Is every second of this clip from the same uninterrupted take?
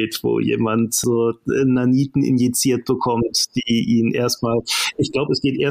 yes; 0 cuts

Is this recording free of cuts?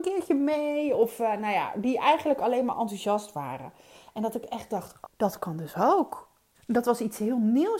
no; 2 cuts; at 5.0 s, 6.5 s

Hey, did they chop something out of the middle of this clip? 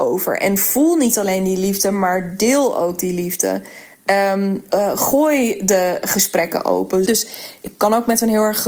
yes; 2 cuts; at 4.7 s, 7.0 s

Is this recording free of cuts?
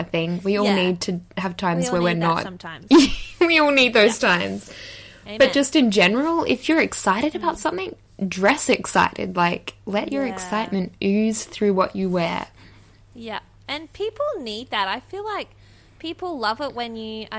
yes; 0 cuts

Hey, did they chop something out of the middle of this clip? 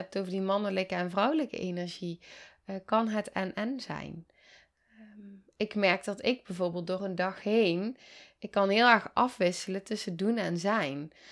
no; 0 cuts

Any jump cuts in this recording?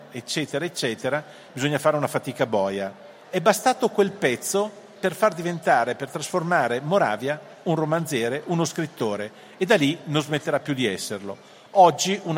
yes; 1 cut; at 3.2 s

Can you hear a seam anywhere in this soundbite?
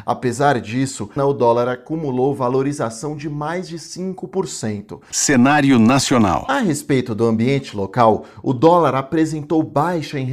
yes; 2 cuts; at 1.2 s, 5.1 s

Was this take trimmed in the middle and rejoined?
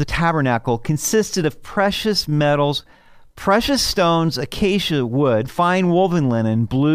no; 0 cuts

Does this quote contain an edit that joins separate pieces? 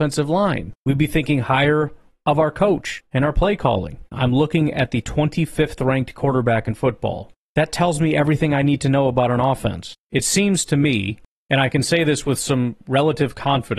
yes; 2 cuts; at 4.1 s, 10.0 s

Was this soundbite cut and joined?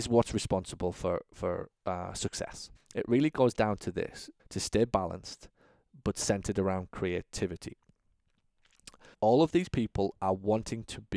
yes; 3 cuts; at 2.8 s, 4.4 s, 9.1 s

